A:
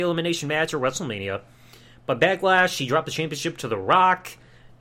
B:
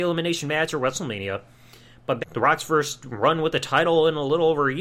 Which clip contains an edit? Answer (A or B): B